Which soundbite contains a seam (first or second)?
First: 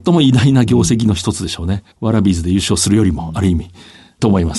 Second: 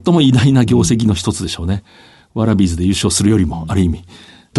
first